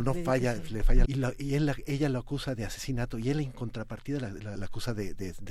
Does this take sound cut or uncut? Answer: cut